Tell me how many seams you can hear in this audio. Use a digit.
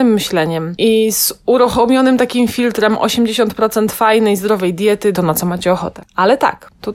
1